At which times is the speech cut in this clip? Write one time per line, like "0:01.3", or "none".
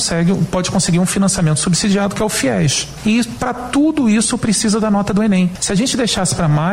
none